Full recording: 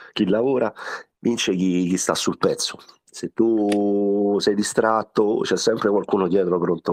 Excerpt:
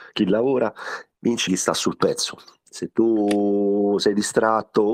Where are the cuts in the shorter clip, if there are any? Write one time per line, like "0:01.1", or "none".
0:01.5